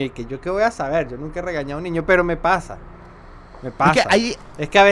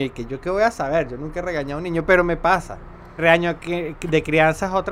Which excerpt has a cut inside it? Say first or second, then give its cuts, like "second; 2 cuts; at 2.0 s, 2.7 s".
second; 1 cut; at 3.2 s